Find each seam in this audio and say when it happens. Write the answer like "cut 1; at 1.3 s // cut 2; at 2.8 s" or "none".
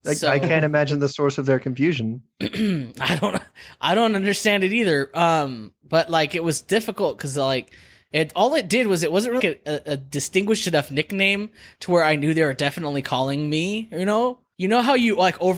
cut 1; at 9.4 s // cut 2; at 14.5 s